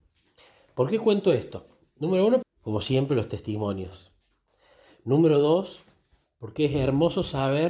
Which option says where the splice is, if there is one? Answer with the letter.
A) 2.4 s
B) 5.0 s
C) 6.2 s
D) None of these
A